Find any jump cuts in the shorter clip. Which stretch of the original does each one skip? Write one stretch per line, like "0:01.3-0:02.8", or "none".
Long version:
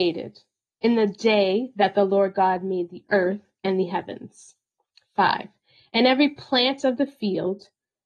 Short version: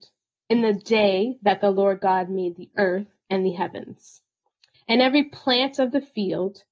0:05.1-0:05.8